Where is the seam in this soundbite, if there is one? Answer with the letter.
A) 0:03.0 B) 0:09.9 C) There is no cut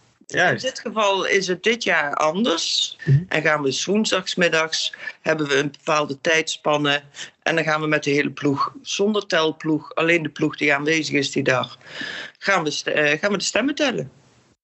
A